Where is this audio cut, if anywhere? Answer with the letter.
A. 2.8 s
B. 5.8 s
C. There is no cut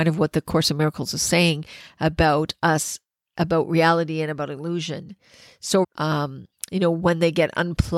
B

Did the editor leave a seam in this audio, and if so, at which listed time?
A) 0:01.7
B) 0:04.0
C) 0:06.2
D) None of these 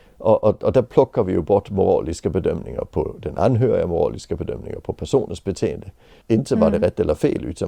C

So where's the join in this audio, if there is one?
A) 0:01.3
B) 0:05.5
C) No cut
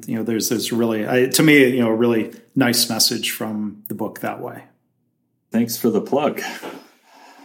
B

